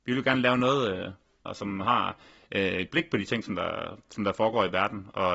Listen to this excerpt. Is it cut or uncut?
cut